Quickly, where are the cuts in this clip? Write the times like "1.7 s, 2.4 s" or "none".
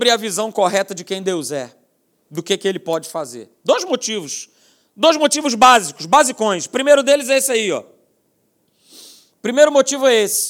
none